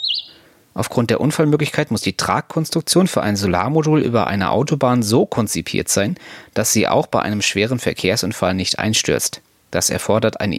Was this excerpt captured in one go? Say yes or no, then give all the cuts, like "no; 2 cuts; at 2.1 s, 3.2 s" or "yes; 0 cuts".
yes; 0 cuts